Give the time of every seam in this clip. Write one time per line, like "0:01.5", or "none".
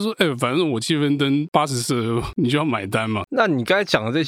0:03.2